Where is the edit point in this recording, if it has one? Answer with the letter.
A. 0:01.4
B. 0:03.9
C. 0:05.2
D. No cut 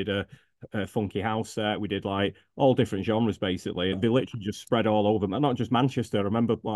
B